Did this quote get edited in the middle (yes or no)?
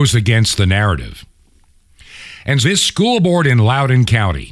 yes